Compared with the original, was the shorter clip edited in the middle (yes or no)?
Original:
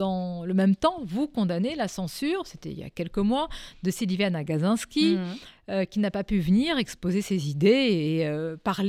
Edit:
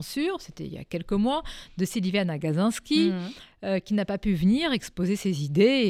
no